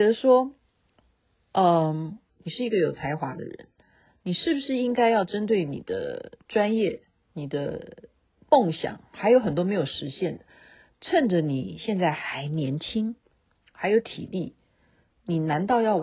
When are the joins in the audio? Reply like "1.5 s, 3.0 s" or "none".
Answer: 2.3 s